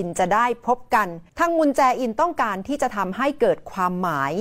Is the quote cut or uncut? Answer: cut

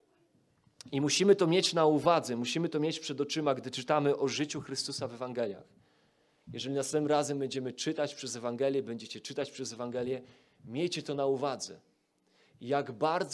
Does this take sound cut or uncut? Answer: uncut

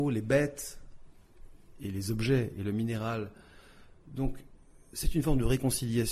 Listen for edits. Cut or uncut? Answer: uncut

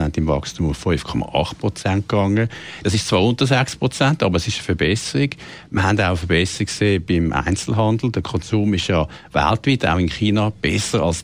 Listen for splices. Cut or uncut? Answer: uncut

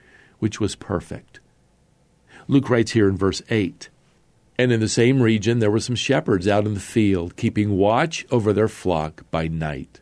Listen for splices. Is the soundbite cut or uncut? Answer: uncut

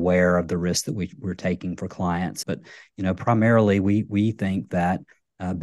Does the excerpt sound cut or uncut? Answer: cut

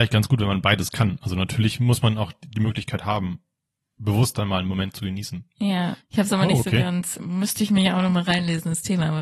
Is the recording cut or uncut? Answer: cut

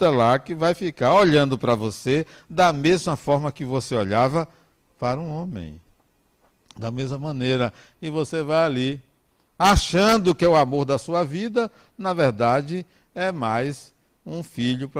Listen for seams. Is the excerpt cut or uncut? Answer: uncut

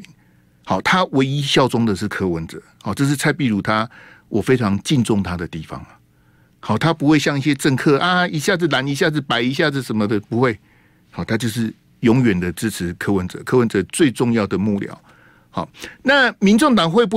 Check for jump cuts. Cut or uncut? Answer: uncut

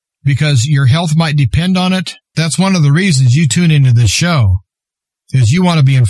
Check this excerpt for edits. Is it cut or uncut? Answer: cut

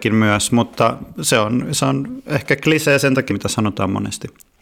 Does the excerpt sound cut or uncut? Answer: cut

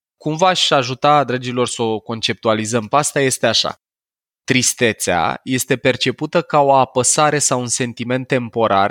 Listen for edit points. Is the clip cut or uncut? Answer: uncut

